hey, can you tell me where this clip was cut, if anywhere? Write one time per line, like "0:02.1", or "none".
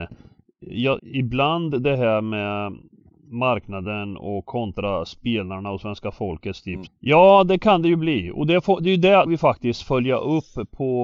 0:01.0
0:06.9
0:09.3